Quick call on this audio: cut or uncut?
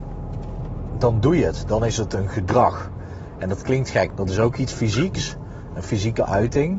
cut